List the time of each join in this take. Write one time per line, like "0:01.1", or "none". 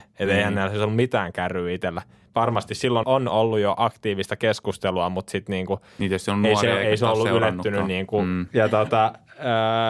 0:03.0
0:08.5